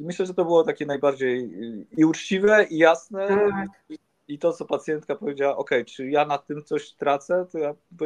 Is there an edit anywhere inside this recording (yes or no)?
no